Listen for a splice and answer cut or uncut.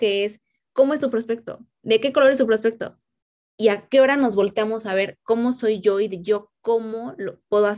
uncut